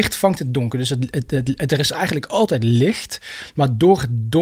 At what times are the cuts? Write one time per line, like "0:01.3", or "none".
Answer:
none